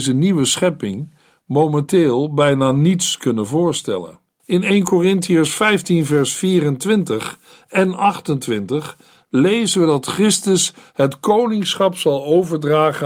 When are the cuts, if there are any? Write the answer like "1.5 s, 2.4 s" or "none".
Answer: 4.4 s